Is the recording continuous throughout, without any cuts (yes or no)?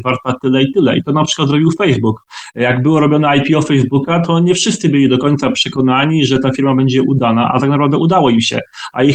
yes